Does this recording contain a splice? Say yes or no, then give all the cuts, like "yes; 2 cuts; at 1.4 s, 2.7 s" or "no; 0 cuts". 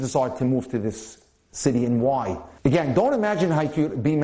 yes; 1 cut; at 2.6 s